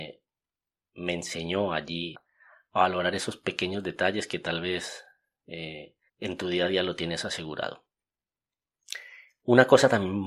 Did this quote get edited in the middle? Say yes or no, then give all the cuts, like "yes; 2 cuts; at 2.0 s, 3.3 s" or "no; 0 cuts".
yes; 2 cuts; at 2.1 s, 6.1 s